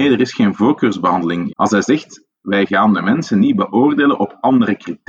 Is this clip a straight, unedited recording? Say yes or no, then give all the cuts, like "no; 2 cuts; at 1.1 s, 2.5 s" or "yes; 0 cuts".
no; 1 cut; at 1.5 s